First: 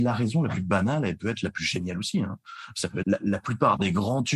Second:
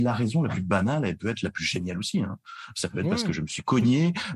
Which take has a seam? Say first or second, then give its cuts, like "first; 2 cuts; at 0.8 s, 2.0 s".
first; 1 cut; at 3.0 s